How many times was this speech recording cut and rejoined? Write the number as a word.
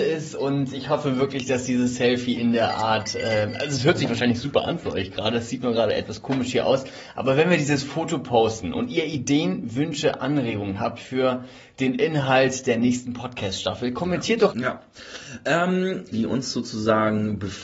two